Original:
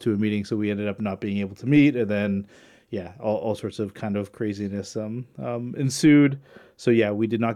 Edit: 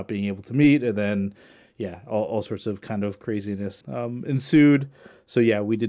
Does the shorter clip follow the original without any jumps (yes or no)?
no